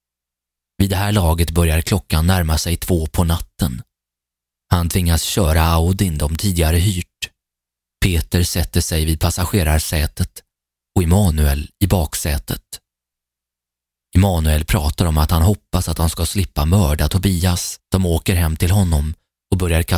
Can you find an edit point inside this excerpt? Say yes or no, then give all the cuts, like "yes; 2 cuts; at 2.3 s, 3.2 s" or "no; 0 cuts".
yes; 1 cut; at 17.8 s